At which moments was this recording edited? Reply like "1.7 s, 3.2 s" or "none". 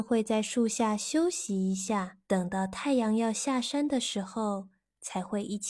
2.2 s

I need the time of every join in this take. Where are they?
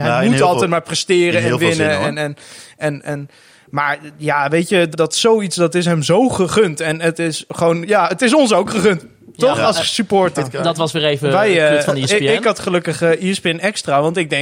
4.9 s, 10.4 s

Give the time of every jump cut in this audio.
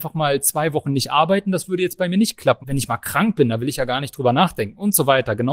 2.6 s

